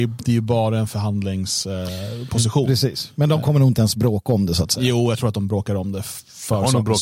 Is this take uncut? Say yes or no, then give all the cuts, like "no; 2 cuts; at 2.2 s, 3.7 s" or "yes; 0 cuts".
yes; 0 cuts